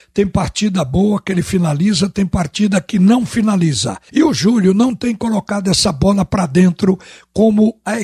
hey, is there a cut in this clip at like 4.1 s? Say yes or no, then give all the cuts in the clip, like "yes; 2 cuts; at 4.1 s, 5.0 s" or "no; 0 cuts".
yes; 1 cut; at 4.1 s